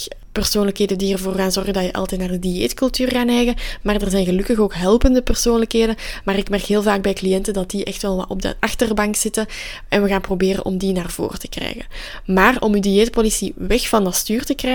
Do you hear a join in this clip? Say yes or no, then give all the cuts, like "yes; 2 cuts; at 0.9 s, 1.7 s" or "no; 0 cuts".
no; 0 cuts